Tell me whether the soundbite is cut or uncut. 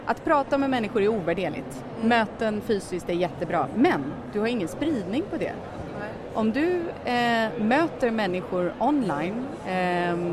uncut